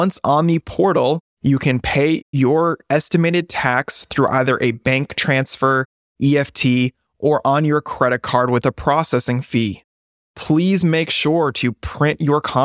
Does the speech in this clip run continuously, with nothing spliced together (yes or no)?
yes